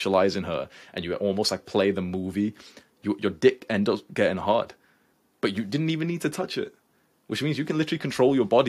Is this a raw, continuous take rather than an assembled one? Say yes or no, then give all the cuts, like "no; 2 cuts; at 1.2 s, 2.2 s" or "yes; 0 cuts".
yes; 0 cuts